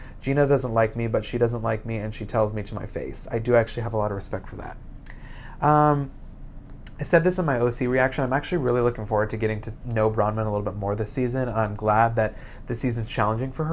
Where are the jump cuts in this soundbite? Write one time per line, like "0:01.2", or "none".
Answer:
none